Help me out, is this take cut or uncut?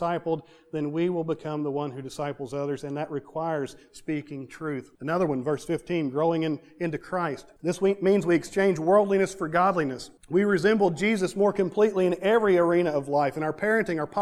cut